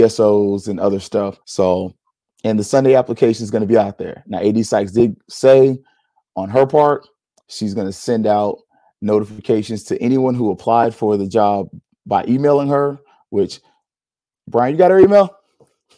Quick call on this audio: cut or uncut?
cut